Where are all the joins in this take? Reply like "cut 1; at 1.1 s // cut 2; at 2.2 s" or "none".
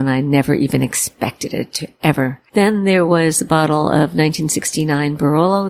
cut 1; at 2.5 s